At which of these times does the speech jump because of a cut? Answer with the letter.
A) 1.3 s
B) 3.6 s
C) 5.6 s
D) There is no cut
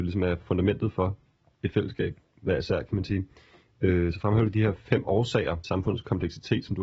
C